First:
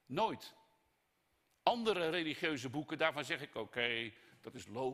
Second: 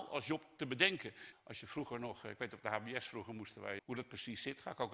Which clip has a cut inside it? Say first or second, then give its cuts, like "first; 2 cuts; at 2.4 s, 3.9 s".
second; 2 cuts; at 1.3 s, 3.8 s